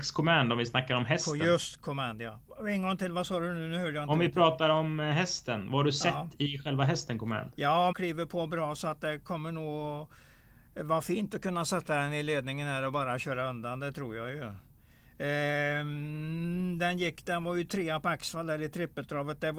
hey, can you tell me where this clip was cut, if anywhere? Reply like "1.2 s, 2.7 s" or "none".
7.9 s